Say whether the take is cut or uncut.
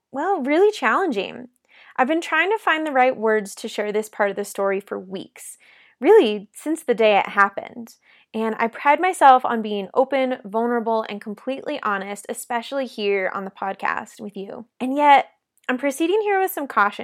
uncut